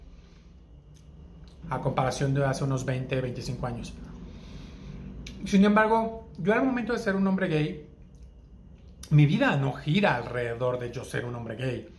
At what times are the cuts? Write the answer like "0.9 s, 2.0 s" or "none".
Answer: 1.6 s